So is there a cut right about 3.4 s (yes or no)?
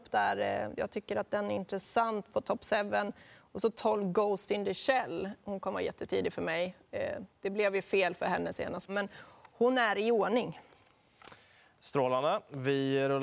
no